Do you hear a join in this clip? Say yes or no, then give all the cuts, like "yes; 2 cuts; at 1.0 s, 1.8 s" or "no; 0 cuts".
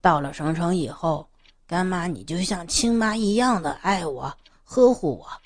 no; 0 cuts